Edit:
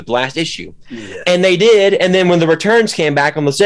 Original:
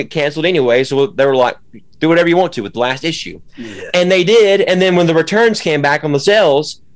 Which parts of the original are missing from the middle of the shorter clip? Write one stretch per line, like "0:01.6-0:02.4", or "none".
none